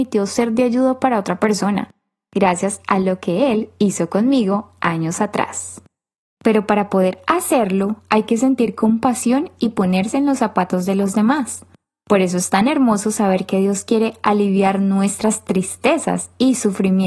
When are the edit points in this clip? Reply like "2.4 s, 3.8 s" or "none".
6.4 s